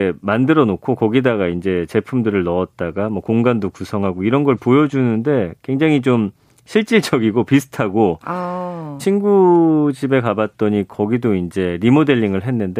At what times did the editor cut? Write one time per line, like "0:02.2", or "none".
0:09.0

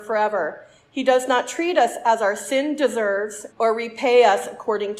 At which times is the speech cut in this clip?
0:03.5

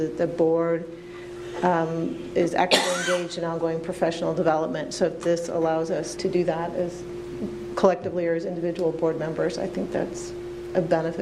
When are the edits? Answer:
0:06.2

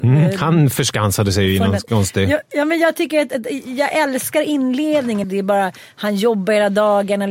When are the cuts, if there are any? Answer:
0:05.2

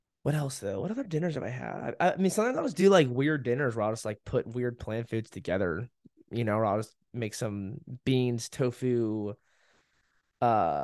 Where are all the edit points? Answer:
none

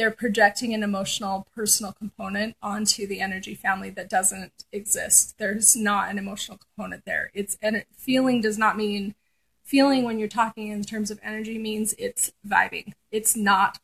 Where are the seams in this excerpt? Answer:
none

